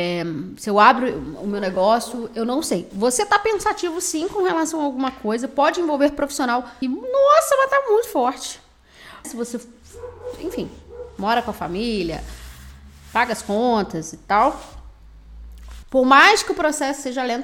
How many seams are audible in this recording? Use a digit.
3